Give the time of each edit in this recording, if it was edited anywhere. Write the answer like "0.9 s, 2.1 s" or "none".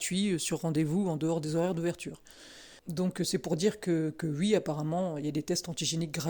2.8 s